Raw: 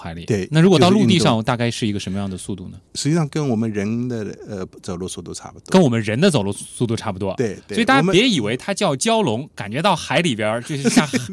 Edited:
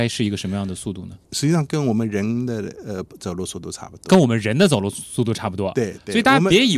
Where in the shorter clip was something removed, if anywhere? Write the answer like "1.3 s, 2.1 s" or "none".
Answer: none